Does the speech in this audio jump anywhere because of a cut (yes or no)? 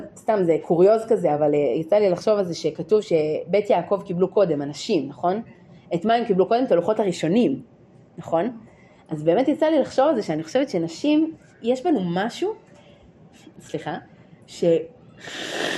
no